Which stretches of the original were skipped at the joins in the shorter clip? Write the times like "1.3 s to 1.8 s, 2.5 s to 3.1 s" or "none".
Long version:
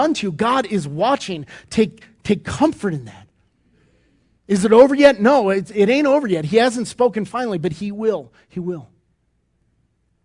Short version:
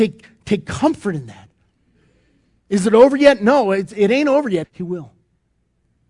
6.4 s to 8.4 s

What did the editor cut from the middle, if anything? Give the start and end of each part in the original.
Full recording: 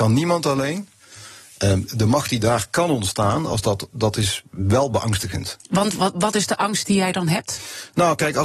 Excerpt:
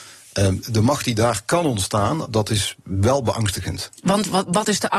3.5 s to 3.9 s

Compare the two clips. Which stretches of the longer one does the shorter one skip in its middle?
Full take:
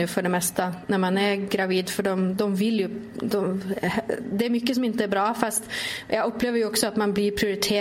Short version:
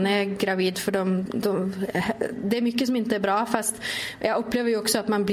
2.4 s to 3.1 s

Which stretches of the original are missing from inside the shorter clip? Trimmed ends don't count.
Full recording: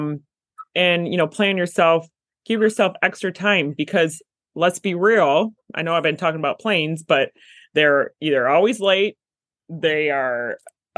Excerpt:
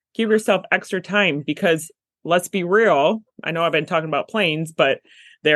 none

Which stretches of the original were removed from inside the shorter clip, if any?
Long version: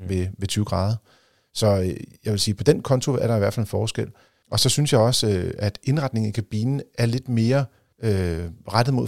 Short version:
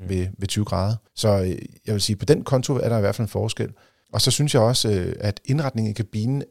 1.1 s to 1.5 s

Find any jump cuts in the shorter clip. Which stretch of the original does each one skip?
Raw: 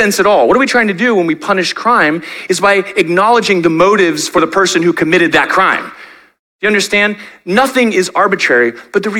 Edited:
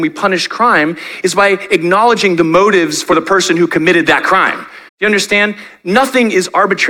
6.1 s to 6.5 s

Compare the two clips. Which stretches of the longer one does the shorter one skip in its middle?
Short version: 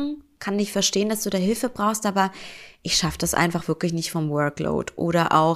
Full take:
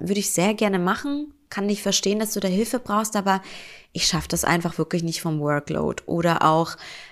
none

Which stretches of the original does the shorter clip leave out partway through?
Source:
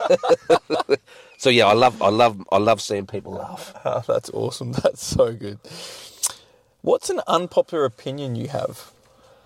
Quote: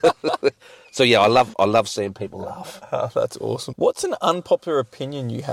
2.0 s to 2.4 s, 4.6 s to 6.8 s

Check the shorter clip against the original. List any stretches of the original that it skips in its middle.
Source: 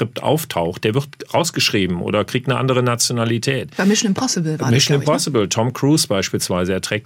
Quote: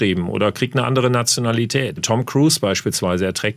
3.7 s to 5.4 s

